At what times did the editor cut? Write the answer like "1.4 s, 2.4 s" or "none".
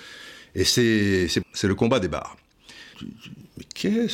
1.4 s, 2.9 s